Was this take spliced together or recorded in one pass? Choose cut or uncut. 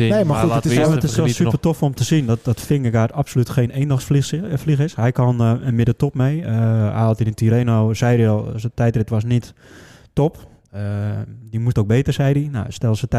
uncut